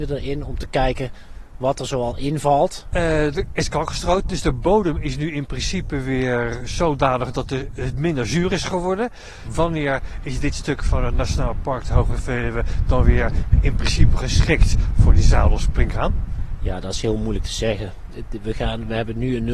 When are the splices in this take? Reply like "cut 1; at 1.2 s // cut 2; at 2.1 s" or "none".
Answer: cut 1; at 2.9 s